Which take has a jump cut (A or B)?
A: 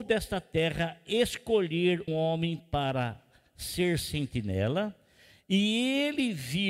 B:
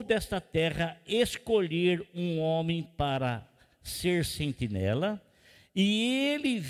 A